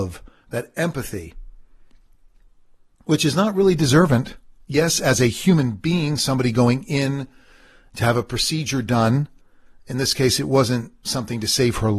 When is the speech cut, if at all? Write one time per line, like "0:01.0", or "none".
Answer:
none